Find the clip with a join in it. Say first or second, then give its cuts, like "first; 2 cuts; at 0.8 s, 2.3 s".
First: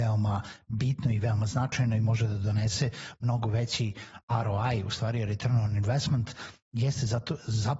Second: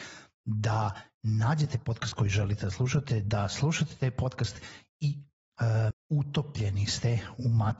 second; 1 cut; at 5.9 s